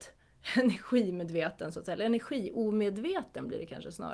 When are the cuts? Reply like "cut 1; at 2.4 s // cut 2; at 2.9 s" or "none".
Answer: none